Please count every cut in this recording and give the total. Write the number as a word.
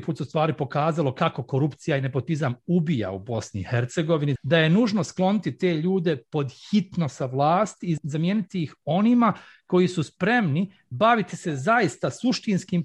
one